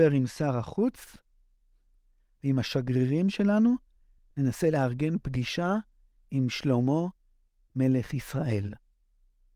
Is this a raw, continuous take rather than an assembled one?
yes; 0 cuts

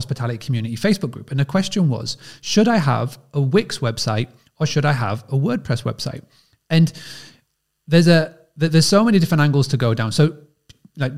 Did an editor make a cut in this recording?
no; 0 cuts

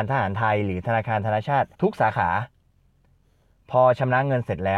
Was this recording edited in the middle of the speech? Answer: yes; 1 cut; at 1.7 s

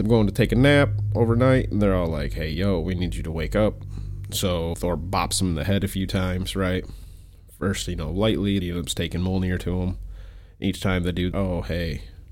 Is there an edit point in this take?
yes; 3 cuts; at 4.7 s, 8.6 s, 11.3 s

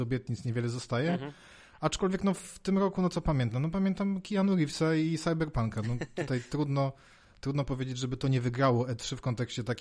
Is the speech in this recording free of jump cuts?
yes; 0 cuts

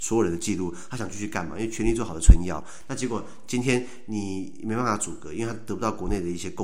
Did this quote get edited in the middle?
no; 0 cuts

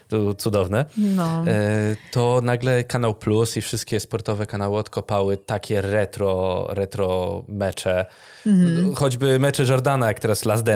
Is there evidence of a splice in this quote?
no; 0 cuts

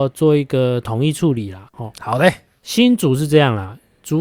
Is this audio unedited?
no; 1 cut; at 1.7 s

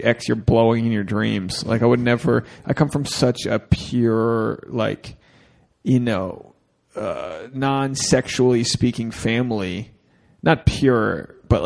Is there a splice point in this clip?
no; 0 cuts

